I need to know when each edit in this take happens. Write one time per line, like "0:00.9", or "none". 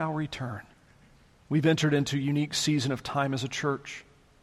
0:01.4